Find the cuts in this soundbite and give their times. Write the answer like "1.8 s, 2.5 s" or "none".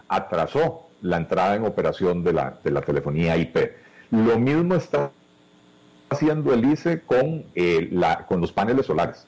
none